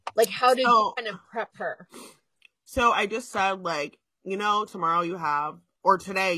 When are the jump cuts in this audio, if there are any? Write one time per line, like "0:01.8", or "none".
none

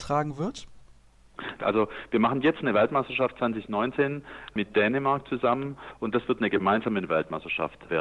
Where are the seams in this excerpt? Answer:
0:01.6

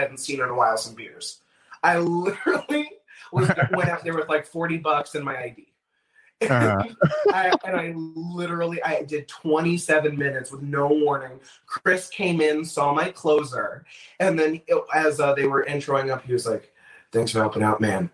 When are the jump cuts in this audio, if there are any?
none

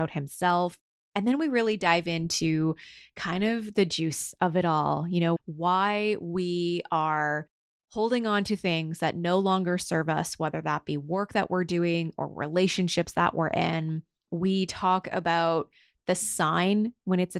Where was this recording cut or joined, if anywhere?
0:05.4

